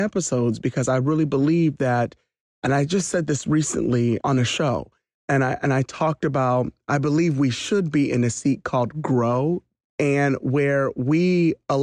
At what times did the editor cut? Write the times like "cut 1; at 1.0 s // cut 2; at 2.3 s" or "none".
cut 1; at 4.2 s // cut 2; at 9.9 s